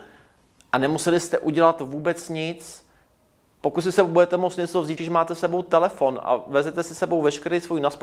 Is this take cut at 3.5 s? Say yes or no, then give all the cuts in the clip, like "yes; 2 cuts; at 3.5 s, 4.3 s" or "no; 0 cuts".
no; 1 cut; at 5.0 s